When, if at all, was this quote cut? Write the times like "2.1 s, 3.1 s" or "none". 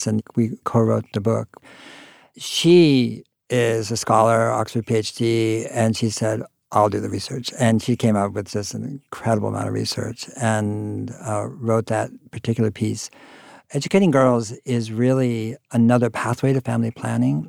none